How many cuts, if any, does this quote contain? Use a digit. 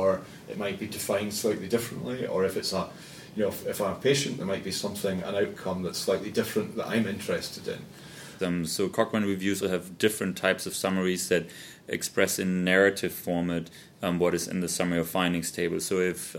2